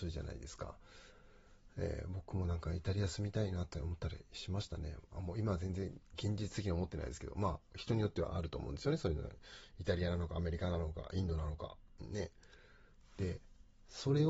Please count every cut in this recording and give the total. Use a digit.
1